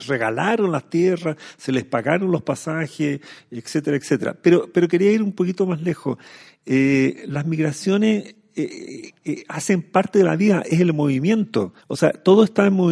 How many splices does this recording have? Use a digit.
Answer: 1